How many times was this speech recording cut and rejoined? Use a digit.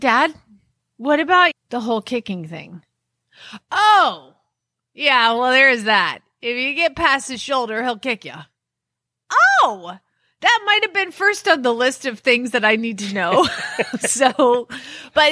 1